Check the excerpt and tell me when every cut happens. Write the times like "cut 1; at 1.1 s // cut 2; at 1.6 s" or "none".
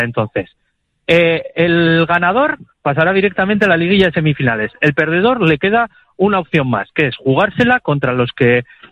cut 1; at 2.7 s